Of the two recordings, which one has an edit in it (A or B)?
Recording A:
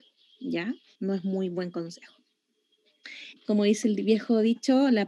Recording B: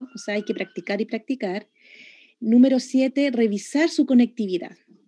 A